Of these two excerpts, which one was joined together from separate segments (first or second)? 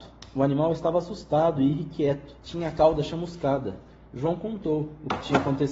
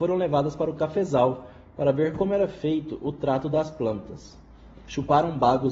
first